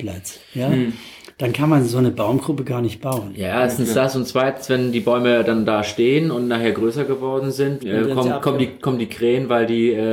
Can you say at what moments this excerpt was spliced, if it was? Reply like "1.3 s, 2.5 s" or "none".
7.8 s